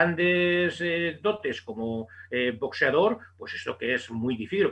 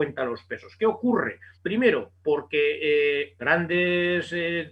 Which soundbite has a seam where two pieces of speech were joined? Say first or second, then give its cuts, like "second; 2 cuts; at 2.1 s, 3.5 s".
second; 2 cuts; at 1.6 s, 3.4 s